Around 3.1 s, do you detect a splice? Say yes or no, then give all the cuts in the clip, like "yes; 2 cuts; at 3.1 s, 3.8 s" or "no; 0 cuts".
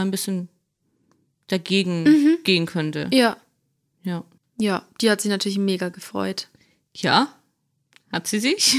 no; 1 cut; at 4.4 s